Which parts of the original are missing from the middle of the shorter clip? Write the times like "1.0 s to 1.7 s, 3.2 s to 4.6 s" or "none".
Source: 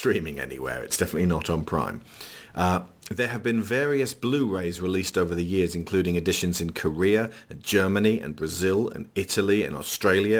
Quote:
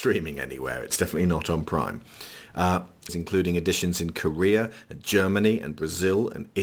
3.1 s to 5.7 s